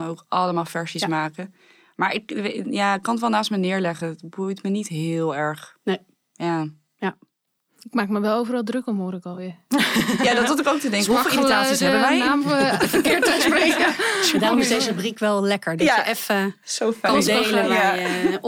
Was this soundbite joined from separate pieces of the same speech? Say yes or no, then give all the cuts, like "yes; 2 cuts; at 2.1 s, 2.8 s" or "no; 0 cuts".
no; 0 cuts